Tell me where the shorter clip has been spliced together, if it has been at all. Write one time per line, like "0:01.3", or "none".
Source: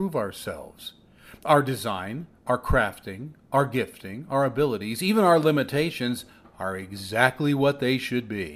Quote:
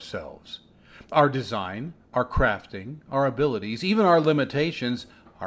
0:03.1